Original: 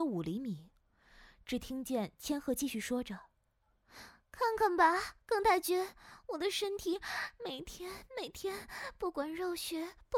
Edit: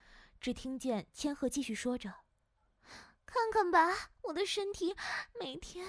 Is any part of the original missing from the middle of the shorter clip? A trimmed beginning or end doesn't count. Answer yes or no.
yes